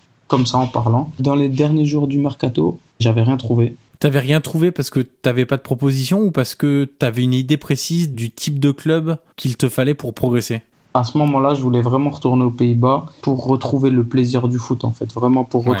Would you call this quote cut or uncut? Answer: uncut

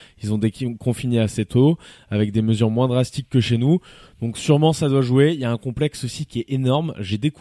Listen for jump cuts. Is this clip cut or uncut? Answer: uncut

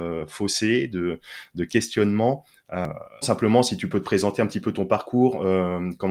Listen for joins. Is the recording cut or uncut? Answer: cut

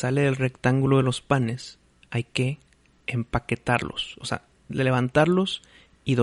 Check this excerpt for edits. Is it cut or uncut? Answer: uncut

